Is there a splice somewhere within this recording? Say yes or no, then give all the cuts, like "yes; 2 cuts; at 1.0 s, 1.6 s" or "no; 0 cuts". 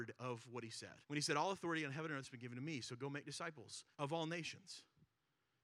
yes; 2 cuts; at 1.0 s, 3.9 s